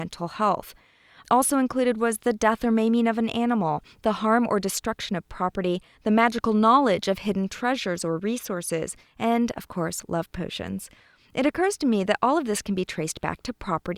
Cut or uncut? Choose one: uncut